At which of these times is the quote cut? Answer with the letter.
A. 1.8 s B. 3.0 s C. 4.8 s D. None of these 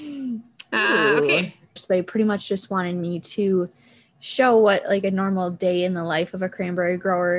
A